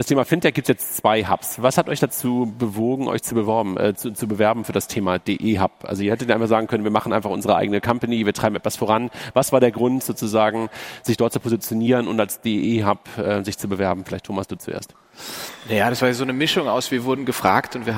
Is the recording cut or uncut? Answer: uncut